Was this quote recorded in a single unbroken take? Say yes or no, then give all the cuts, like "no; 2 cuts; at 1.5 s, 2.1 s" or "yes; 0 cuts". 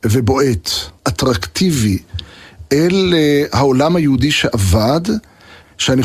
no; 1 cut; at 1.0 s